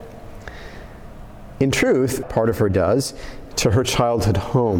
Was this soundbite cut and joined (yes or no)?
yes